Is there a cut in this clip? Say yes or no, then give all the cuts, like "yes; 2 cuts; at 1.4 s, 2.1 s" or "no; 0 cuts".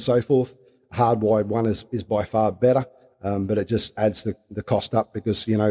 no; 0 cuts